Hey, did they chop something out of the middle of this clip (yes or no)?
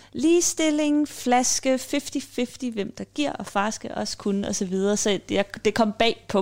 no